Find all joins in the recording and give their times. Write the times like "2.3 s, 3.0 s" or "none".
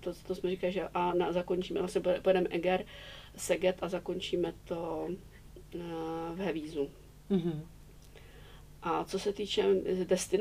none

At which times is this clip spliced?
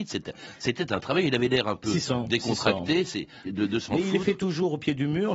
3.4 s

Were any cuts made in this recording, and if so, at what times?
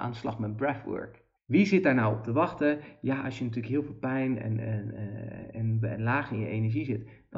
1.4 s

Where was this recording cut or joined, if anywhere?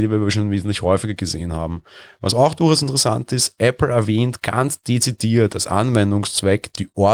none

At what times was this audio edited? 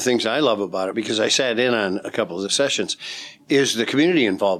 none

